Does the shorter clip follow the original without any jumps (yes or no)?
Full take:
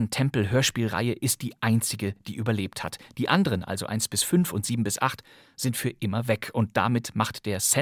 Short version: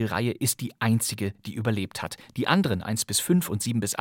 no